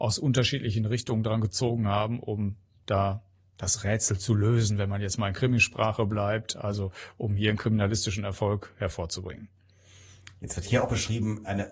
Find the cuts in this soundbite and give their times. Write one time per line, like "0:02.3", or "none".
none